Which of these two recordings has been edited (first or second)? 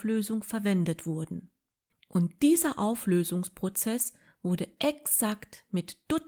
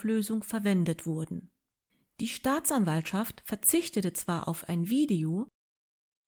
first